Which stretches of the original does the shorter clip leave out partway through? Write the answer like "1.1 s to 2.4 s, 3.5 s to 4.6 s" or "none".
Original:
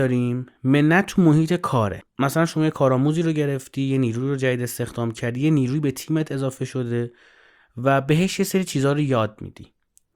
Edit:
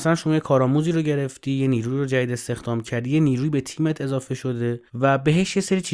7.2 s to 7.7 s